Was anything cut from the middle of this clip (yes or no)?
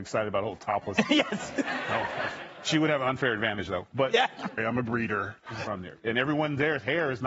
yes